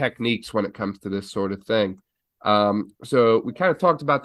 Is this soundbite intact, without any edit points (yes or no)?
yes